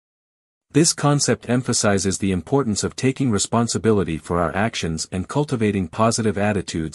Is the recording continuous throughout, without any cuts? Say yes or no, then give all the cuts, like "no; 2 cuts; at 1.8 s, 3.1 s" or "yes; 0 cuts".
yes; 0 cuts